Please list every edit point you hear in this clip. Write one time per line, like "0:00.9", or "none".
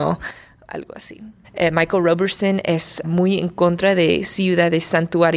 0:01.4
0:03.0